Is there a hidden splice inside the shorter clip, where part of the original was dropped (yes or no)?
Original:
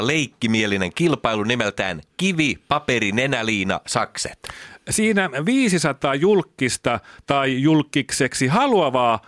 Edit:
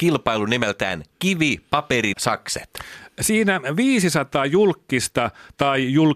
yes